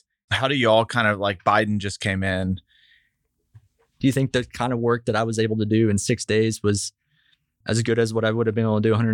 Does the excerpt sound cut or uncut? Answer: cut